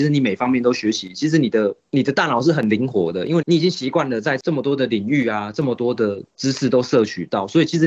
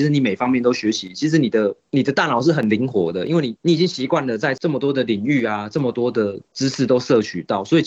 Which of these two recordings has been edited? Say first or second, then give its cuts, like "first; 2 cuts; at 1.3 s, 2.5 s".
first; 1 cut; at 3.4 s